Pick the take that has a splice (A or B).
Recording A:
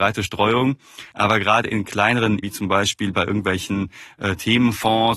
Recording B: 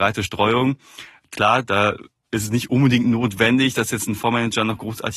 A